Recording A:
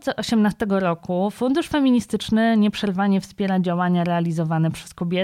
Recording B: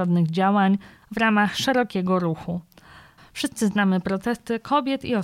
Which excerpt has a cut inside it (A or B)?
B